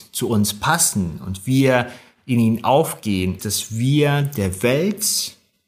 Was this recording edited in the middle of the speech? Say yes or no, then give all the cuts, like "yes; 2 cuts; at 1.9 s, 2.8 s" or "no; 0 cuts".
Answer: yes; 1 cut; at 3.4 s